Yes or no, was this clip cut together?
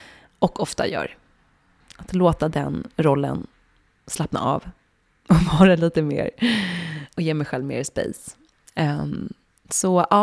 yes